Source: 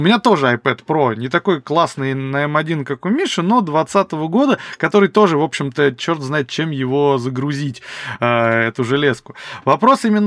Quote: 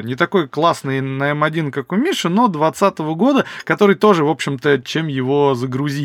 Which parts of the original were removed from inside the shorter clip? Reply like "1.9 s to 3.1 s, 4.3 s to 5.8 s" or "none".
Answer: 6.0 s to 6.5 s